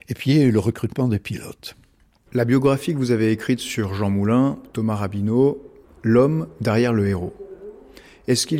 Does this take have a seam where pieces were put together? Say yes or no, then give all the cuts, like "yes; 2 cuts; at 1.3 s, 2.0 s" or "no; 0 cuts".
yes; 2 cuts; at 2.3 s, 5.8 s